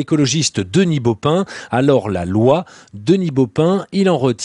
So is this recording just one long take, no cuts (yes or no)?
no